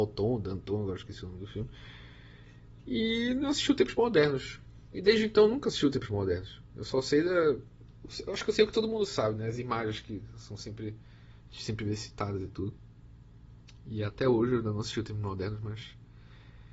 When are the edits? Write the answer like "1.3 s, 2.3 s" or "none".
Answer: none